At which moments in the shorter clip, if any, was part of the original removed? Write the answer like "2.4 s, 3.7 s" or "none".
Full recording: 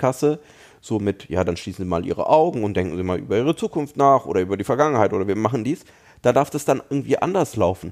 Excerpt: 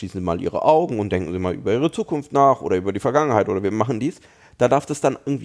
none